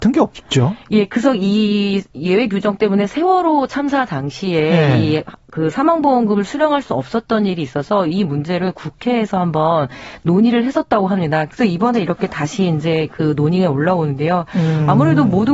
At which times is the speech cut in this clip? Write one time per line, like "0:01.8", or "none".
0:11.5